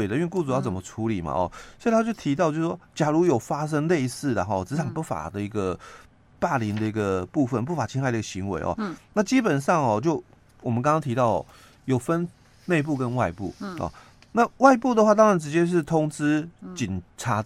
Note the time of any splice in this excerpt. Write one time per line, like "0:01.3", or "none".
none